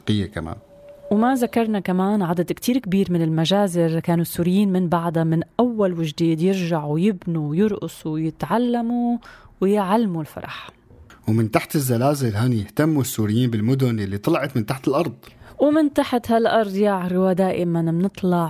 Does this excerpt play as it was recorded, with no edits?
yes; 0 cuts

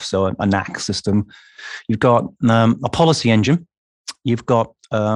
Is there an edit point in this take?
no; 0 cuts

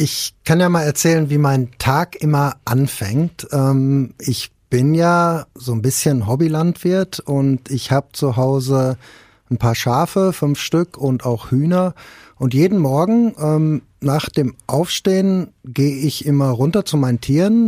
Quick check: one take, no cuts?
yes; 0 cuts

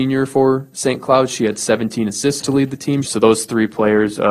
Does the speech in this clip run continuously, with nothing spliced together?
no; 1 cut; at 3.0 s

